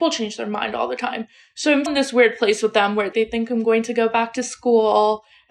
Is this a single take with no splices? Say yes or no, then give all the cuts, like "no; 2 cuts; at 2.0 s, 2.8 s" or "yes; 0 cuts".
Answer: no; 2 cuts; at 1.9 s, 3.1 s